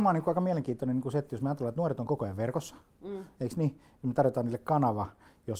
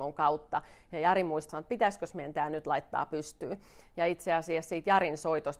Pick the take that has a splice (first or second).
second